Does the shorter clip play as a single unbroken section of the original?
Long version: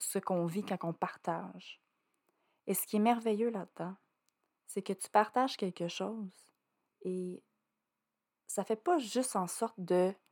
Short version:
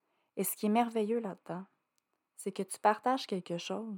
yes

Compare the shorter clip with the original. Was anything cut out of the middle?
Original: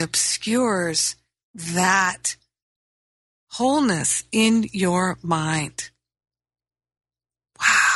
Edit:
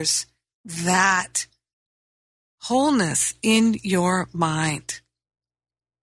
no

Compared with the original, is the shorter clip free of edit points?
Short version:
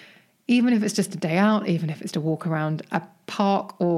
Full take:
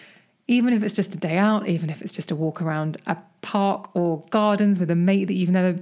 no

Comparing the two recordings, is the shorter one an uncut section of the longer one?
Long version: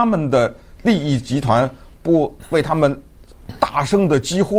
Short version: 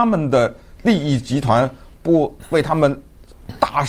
yes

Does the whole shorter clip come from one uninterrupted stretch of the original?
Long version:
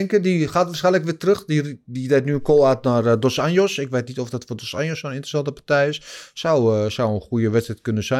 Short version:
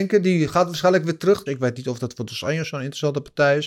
no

